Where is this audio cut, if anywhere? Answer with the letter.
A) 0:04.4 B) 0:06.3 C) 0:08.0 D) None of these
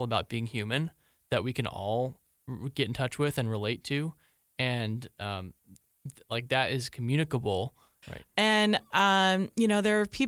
C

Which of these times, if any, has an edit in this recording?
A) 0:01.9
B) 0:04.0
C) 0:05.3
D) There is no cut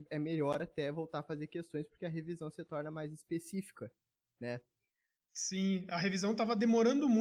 D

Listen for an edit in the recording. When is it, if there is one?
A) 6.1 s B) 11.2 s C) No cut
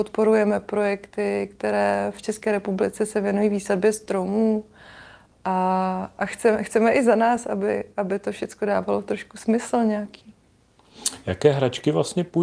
C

